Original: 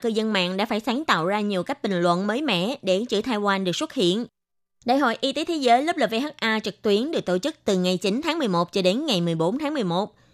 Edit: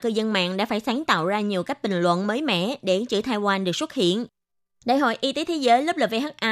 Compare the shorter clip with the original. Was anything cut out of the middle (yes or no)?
no